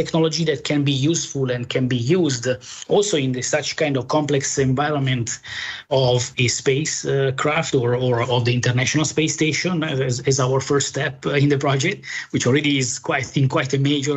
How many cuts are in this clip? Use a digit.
0